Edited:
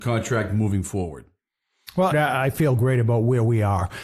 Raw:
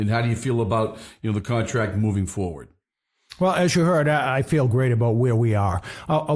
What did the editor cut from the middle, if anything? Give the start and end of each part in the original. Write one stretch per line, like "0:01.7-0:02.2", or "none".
0:03.5-0:04.0